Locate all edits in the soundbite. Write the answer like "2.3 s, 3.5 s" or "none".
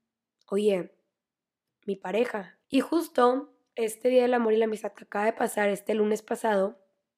2.6 s